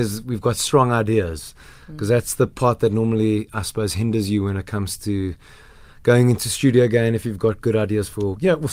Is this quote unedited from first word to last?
yes; 0 cuts

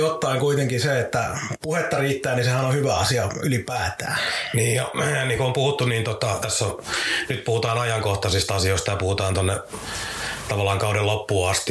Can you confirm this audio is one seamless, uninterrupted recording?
yes; 0 cuts

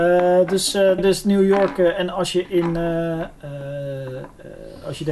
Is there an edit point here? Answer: yes; 1 cut; at 1.0 s

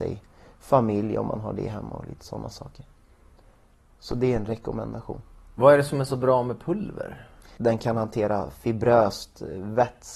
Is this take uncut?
no; 1 cut; at 7.6 s

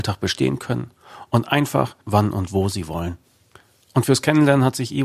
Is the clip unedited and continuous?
no; 1 cut; at 2.0 s

